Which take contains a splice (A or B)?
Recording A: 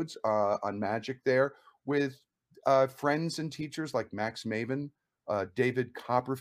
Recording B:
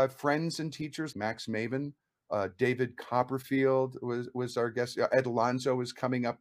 B